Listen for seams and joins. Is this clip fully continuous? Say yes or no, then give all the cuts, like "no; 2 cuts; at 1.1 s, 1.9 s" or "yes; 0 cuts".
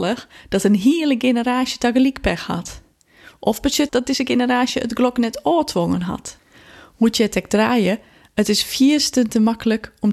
no; 1 cut; at 3.9 s